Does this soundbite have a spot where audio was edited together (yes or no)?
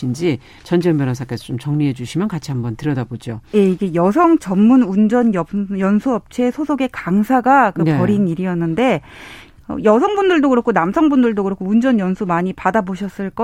no